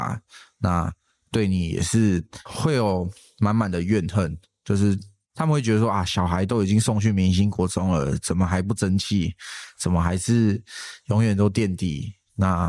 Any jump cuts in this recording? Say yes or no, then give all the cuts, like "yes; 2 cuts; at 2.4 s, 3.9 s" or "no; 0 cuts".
no; 0 cuts